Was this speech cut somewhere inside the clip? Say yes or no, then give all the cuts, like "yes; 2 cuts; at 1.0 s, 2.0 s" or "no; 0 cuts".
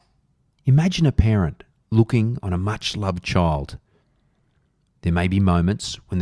no; 0 cuts